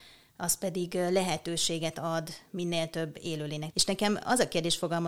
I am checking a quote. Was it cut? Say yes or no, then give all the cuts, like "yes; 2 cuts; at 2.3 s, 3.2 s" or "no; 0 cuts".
yes; 1 cut; at 3.7 s